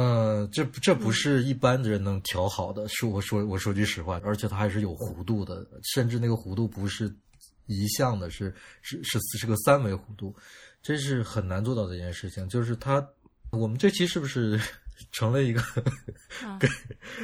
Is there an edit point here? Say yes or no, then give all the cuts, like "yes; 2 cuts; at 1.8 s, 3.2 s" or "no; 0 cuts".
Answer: yes; 2 cuts; at 4.2 s, 13.5 s